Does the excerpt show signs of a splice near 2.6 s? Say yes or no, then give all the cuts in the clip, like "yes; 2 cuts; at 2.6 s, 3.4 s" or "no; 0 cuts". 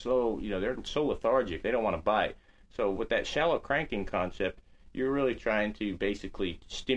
no; 0 cuts